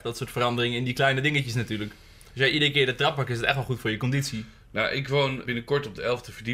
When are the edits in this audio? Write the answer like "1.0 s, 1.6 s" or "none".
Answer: 5.5 s

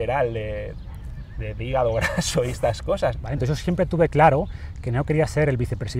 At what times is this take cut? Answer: 1.6 s, 3.1 s

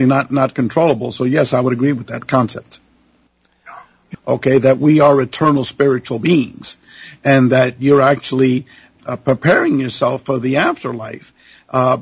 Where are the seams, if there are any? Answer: 4.1 s, 9.0 s

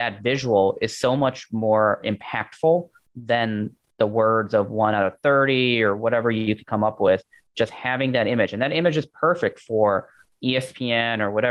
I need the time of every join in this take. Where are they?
none

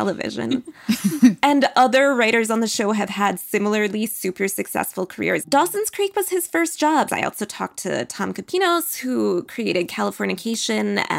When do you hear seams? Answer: 5.4 s, 7.1 s

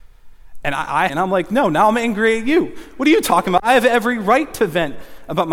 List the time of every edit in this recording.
1.1 s

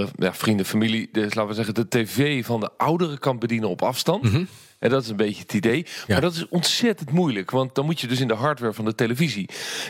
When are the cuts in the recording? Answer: none

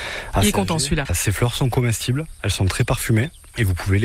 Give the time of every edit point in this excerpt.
1.0 s

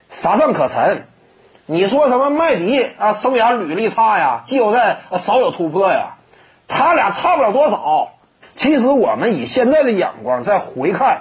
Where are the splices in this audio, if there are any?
8.4 s

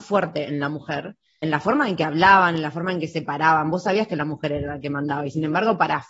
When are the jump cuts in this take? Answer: 1.4 s

